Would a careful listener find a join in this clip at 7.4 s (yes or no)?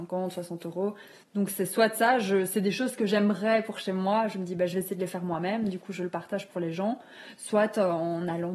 no